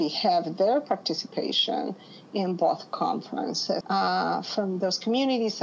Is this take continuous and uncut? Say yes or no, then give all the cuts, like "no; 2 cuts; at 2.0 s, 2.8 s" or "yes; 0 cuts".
no; 1 cut; at 3.8 s